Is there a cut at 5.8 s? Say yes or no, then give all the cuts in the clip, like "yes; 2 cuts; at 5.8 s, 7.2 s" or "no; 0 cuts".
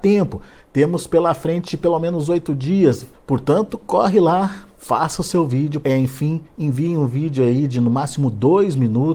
yes; 2 cuts; at 3.1 s, 5.8 s